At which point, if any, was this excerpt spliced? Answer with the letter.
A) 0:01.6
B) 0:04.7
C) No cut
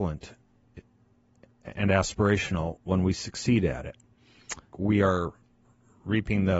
B